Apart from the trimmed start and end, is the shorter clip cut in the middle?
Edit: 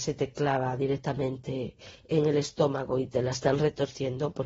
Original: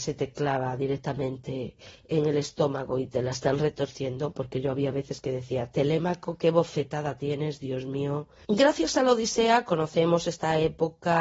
no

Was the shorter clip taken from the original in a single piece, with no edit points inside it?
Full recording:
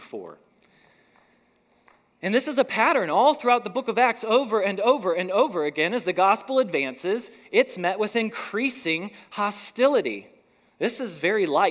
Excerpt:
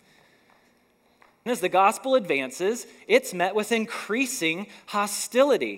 no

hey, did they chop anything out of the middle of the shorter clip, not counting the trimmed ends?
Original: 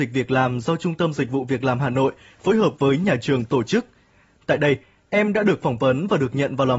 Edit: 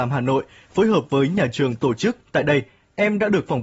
yes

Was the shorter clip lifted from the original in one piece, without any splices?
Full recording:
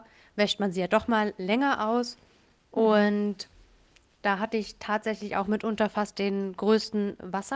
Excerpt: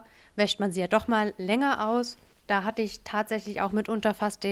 no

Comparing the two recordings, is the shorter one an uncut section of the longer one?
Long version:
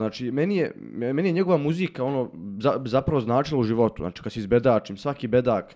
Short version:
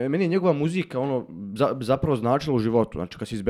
yes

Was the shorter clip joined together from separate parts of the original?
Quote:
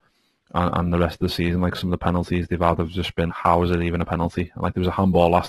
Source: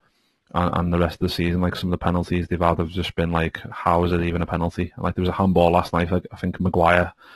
yes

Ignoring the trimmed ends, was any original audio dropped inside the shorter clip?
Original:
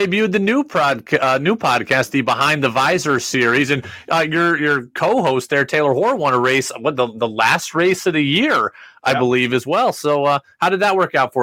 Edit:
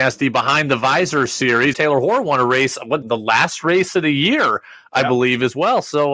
yes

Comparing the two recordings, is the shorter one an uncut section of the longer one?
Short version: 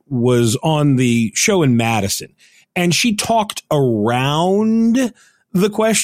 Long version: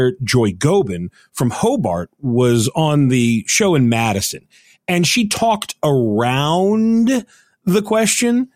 yes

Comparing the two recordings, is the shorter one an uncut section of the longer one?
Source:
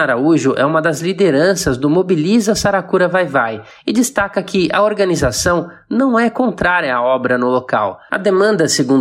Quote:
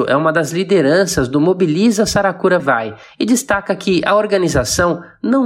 no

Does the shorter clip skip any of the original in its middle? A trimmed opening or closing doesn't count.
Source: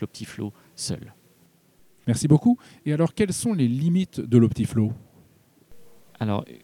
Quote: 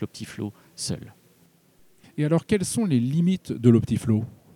yes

